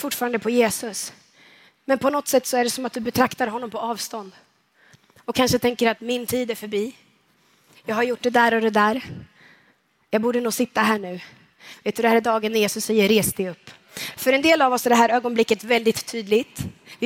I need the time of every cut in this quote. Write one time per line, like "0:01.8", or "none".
0:14.1